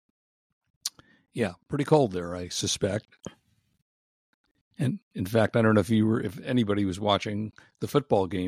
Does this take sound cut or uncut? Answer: uncut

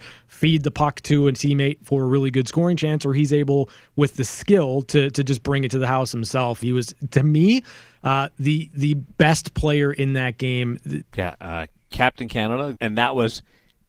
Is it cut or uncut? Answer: cut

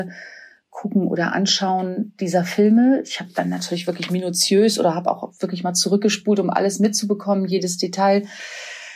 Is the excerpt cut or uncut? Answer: uncut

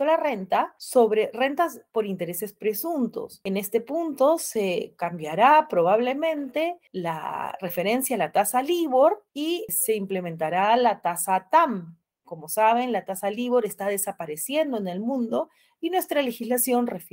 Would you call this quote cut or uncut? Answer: cut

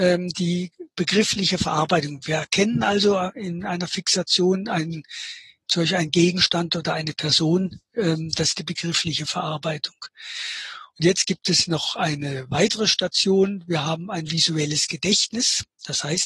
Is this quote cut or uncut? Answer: uncut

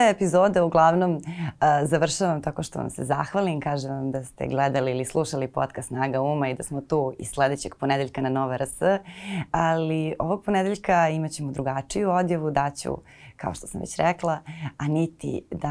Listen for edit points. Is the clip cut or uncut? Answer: uncut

